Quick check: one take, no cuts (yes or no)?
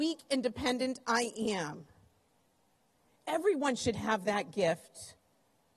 yes